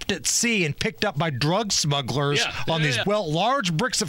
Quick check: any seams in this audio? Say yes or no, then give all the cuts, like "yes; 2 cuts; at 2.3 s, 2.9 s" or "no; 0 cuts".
yes; 1 cut; at 3.0 s